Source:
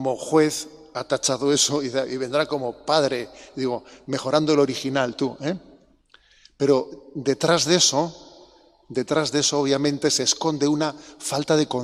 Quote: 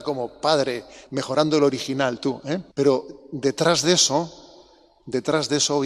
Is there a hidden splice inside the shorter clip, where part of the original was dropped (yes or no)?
yes